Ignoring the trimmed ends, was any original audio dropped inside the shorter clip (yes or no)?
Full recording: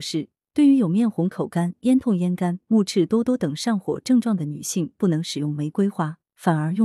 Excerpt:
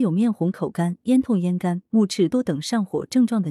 yes